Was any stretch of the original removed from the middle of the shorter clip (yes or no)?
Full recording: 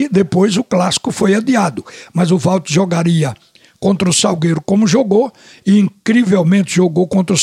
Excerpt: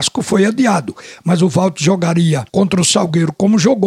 yes